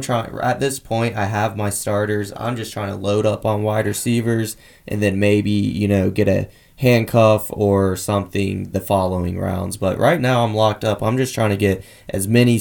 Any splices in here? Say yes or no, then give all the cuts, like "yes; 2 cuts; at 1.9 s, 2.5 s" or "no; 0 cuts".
no; 0 cuts